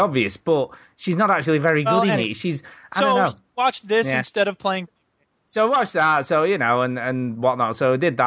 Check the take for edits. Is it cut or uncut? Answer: uncut